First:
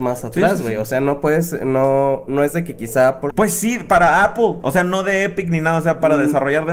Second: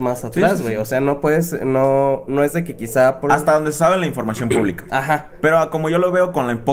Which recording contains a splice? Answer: first; 1 cut; at 3.3 s

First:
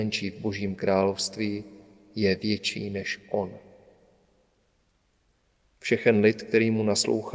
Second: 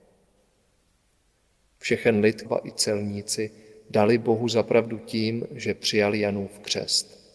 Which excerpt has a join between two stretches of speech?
second; 1 cut; at 2.4 s

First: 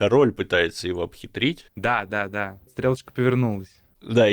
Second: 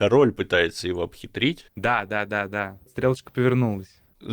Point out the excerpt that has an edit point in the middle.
first; 1 cut; at 2.1 s

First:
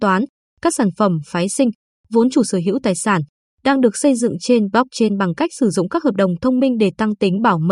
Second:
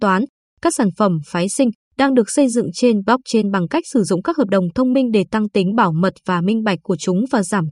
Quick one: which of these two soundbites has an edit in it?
second; 1 cut; at 1.8 s

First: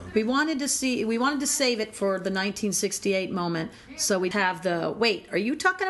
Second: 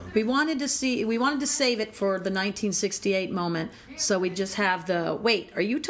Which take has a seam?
first; 1 cut; at 4.3 s

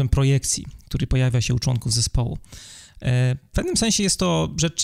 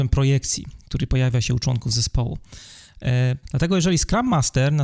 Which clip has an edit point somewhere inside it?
second; 1 cut; at 3.4 s

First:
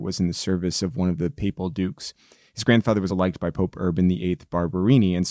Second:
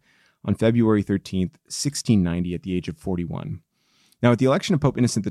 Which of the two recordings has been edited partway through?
first; 1 cut; at 3.1 s

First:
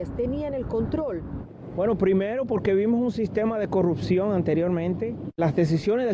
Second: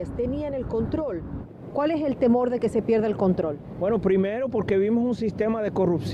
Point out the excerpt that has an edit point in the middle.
first; 1 cut; at 1.7 s

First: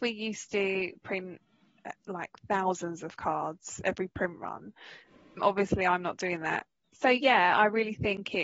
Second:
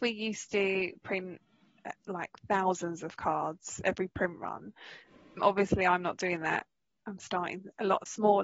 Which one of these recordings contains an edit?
first; 1 cut; at 6.8 s

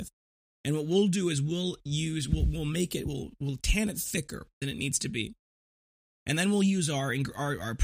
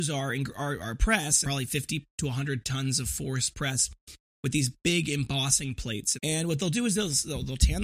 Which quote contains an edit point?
second; 2 cuts; at 1.4 s, 6.1 s

